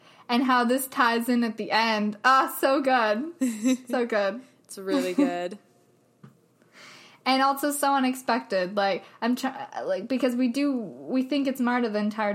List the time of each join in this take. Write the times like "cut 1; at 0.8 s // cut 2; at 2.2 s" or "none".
none